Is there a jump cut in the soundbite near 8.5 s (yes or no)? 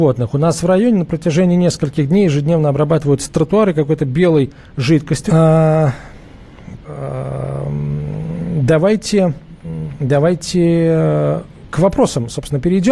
no